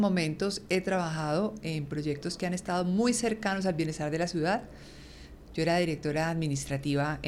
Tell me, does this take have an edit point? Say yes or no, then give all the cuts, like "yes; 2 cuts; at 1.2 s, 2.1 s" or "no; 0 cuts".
yes; 1 cut; at 5.5 s